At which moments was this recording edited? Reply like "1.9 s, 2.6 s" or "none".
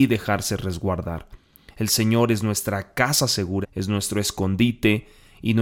3.6 s